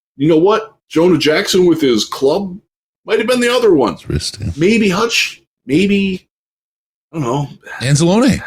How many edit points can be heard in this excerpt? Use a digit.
0